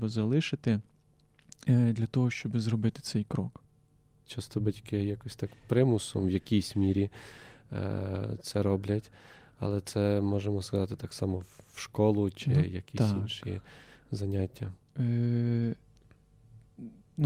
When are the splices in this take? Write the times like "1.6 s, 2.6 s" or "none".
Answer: 4.3 s